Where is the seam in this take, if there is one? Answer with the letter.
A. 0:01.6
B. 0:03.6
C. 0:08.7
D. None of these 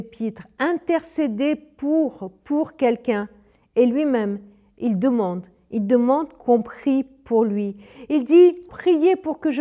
C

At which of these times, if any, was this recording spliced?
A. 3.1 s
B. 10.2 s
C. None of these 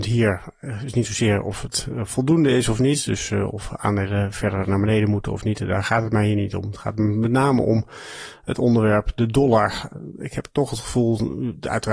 C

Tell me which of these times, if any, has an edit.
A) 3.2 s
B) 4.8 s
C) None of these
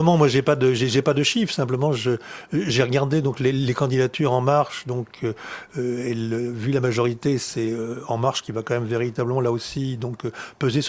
C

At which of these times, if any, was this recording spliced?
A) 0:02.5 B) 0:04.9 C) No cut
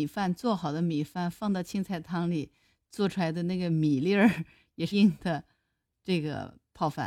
B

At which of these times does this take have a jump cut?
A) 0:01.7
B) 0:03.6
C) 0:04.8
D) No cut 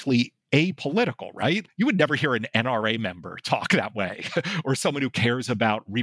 A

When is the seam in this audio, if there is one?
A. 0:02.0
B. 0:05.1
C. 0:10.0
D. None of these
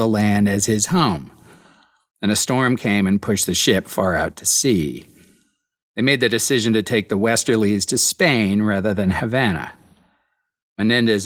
D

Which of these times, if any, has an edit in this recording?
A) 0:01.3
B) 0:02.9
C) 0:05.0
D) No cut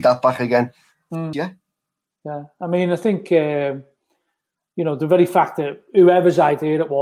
A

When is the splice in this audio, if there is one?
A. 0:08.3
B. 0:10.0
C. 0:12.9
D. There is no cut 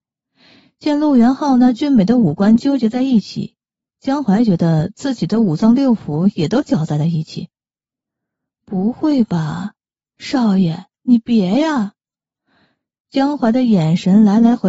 C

